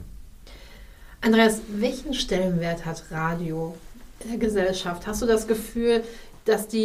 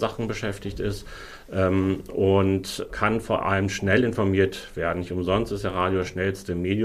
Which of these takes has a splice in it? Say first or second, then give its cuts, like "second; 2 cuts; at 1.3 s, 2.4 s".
second; 1 cut; at 2.9 s